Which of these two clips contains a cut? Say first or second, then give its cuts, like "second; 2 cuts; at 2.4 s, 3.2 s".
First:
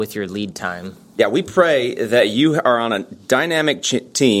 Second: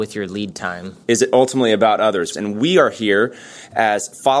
second; 2 cuts; at 1.0 s, 2.3 s